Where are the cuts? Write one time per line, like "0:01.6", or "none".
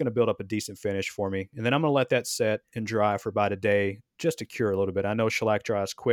none